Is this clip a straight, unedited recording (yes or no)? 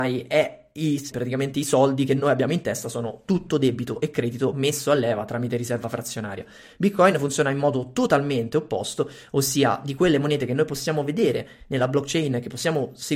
no